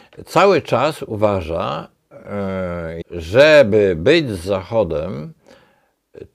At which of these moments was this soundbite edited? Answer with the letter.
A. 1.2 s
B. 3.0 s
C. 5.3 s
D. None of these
B